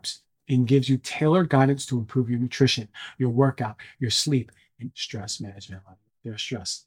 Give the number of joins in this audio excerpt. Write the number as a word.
one